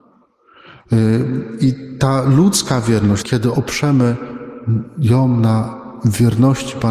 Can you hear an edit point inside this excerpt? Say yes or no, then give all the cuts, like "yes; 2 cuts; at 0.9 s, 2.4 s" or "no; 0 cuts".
yes; 1 cut; at 3.2 s